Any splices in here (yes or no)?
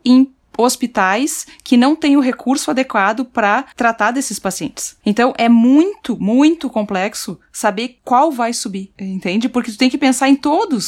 no